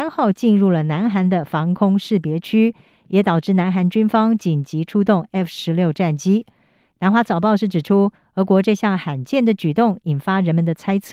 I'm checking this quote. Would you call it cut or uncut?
uncut